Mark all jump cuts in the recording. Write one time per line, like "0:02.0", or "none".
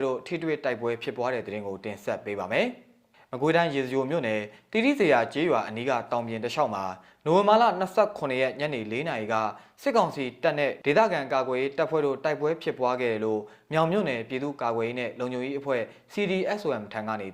none